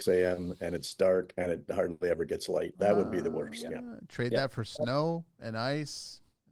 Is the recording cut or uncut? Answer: uncut